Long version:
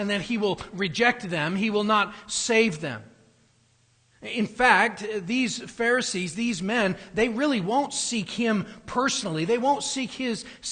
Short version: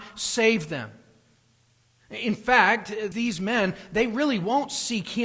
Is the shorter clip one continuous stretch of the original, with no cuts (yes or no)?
no